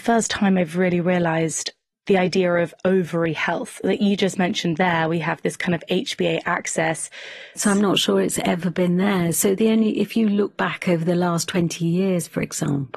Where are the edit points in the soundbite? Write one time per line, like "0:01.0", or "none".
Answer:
0:07.5